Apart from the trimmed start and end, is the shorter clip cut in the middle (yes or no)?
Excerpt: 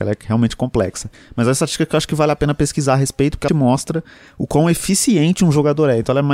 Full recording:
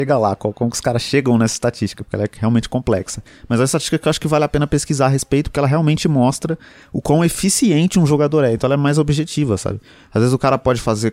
yes